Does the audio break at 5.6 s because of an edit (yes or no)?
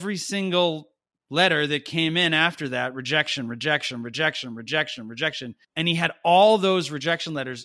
yes